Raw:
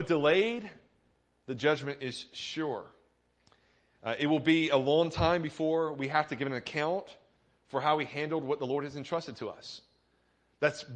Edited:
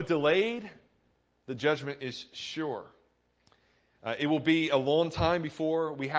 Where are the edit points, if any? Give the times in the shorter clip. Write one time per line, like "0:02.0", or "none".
none

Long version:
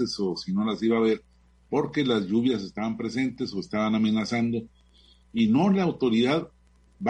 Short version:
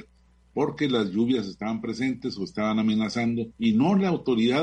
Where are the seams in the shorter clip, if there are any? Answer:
0:03.5

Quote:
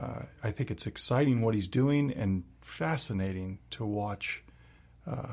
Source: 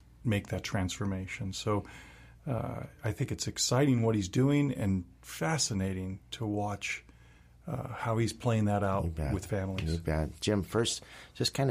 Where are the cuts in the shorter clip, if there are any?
none

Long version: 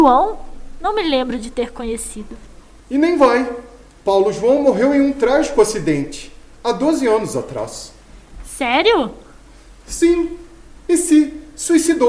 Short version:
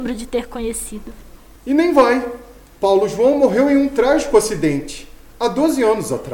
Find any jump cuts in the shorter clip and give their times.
none

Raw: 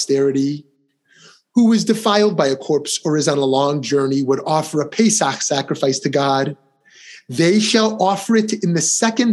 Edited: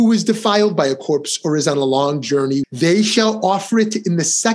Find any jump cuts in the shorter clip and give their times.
0:02.6

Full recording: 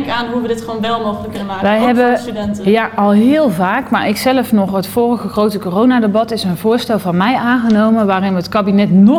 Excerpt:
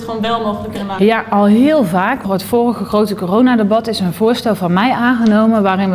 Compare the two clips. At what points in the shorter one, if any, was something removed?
0:01.0
0:02.2

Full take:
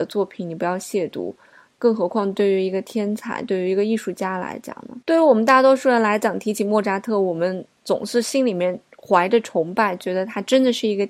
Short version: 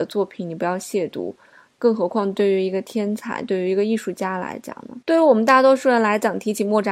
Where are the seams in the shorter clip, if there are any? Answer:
none

